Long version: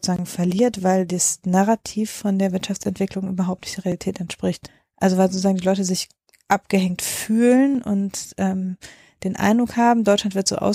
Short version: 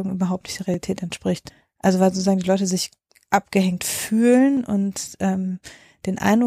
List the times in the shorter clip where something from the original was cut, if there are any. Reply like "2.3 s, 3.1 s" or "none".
none